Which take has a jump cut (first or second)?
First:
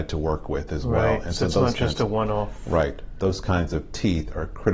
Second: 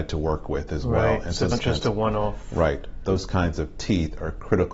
second